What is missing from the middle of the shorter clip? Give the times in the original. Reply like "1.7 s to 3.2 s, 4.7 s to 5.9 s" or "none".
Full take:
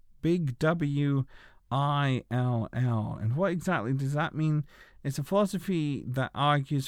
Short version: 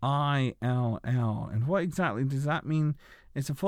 none